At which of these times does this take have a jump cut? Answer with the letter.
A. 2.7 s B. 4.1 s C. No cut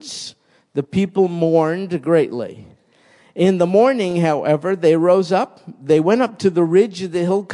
C